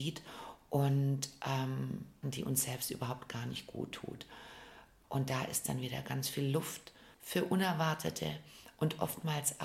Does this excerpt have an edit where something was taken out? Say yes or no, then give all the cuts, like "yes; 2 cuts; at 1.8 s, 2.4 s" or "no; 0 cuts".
yes; 2 cuts; at 2.2 s, 5.0 s